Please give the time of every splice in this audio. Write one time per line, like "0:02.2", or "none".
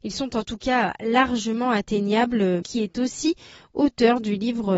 0:02.6